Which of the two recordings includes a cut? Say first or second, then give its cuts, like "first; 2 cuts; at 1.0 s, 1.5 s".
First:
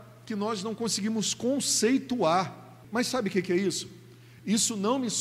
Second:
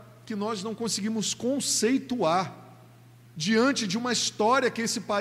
first; 1 cut; at 2.8 s